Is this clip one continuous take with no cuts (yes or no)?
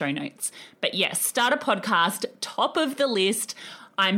yes